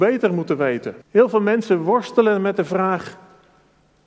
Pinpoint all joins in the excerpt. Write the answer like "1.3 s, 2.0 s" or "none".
1.0 s

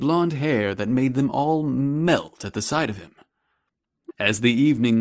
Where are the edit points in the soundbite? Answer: 4.1 s

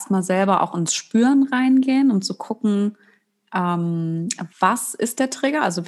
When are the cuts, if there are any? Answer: 4.5 s

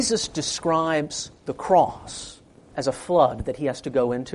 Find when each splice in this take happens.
none

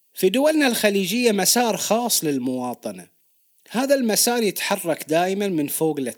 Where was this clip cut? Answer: none

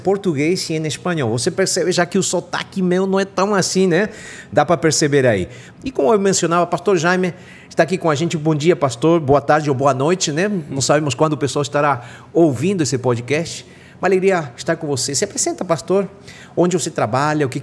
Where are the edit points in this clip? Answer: 5.7 s

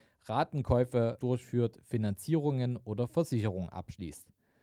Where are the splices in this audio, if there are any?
1.2 s

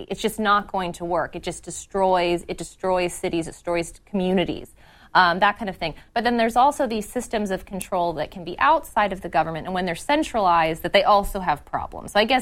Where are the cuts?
none

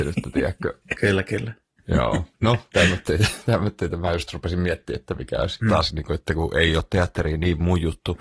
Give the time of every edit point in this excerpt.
2.3 s, 5.6 s

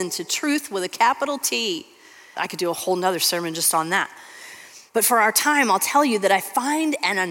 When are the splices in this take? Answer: 2.3 s, 4.9 s

